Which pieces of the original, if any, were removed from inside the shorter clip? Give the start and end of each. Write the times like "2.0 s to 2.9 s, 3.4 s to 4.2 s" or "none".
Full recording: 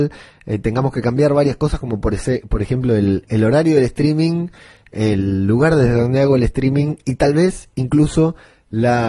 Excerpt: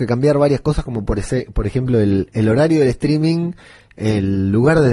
none

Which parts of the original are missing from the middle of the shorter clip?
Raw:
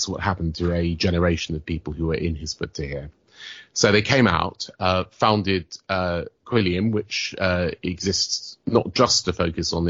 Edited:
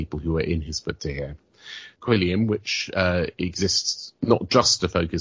3.7 s to 6.4 s

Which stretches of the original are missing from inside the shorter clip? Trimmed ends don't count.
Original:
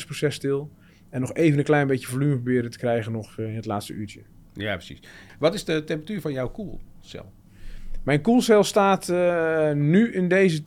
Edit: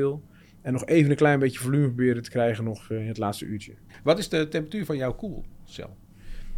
4.4 s to 5.2 s

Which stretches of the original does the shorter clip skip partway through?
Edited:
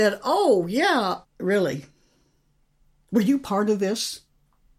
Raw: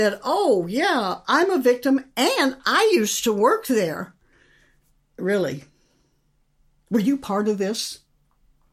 1.2 s to 5.0 s

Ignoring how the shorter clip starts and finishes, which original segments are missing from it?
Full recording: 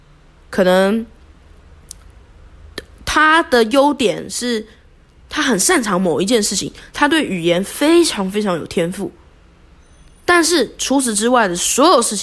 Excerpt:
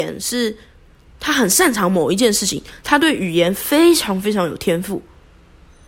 none

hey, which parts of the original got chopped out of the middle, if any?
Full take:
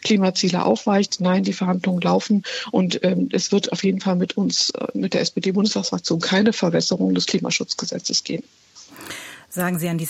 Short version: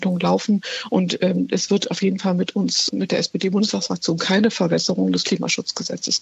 4.7 s to 4.9 s

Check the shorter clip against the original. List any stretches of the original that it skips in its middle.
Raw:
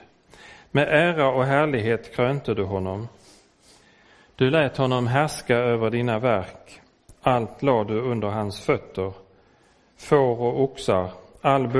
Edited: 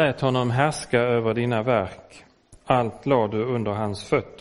none

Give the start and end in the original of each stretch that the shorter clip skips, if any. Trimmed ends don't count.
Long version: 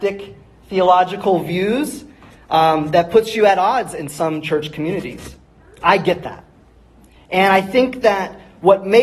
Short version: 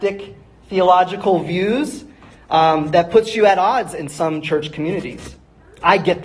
none

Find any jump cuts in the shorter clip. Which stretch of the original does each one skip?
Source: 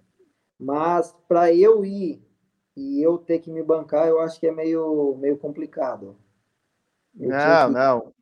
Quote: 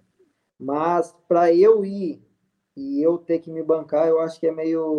none

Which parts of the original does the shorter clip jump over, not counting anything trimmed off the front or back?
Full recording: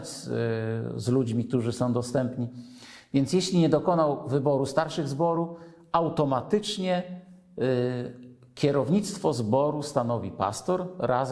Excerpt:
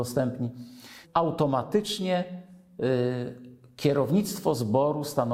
3.0 s to 5.8 s

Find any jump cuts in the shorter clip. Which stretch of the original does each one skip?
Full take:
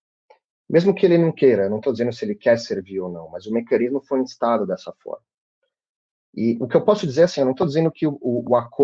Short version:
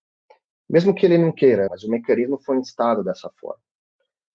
1.7 s to 3.3 s

